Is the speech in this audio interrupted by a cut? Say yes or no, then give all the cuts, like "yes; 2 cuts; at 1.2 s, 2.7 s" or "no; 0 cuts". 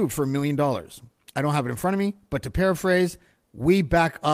yes; 1 cut; at 1.3 s